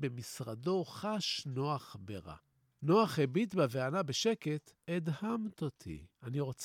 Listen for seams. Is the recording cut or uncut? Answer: cut